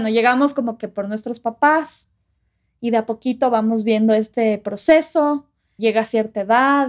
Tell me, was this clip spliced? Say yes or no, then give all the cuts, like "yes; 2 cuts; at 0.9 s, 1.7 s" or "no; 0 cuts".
yes; 1 cut; at 5.8 s